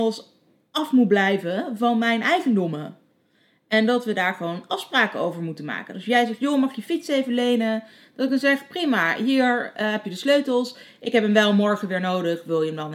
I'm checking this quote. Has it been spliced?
no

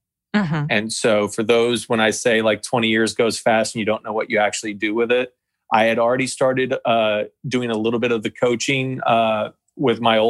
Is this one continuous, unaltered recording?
yes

